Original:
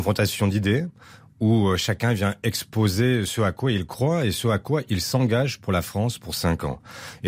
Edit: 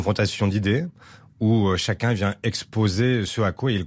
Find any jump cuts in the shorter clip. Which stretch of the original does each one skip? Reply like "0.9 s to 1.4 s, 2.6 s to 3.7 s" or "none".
none